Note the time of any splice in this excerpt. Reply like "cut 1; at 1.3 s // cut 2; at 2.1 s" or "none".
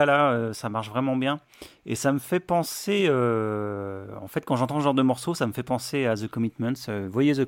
none